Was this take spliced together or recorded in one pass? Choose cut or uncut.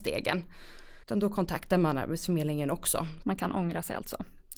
cut